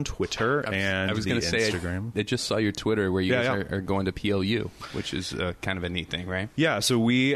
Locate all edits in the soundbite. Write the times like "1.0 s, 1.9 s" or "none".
none